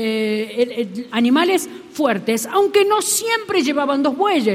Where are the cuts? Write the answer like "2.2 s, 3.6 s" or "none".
1.1 s